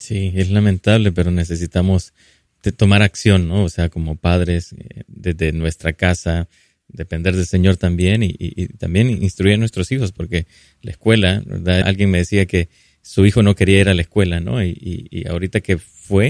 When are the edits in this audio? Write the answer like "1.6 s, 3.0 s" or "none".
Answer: 11.8 s